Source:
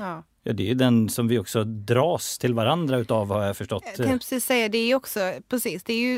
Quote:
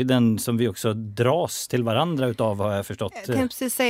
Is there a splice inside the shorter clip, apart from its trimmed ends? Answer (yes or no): no